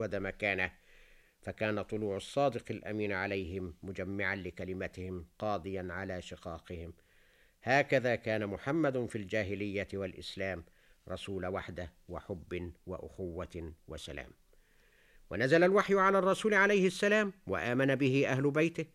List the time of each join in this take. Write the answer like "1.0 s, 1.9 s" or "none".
none